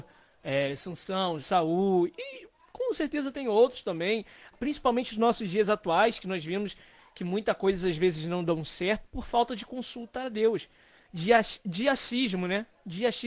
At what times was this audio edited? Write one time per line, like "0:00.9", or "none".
0:01.4
0:04.5